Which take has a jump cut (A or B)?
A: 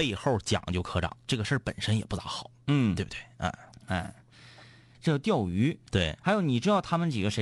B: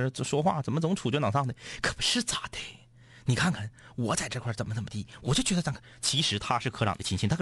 A